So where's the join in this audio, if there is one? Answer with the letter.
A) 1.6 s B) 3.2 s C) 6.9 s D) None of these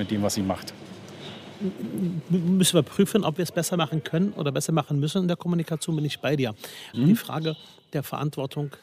C